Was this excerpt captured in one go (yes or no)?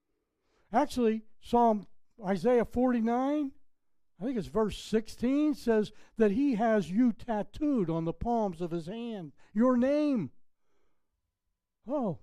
yes